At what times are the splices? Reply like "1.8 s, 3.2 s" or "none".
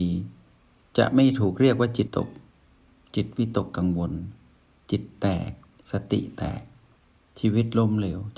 2.1 s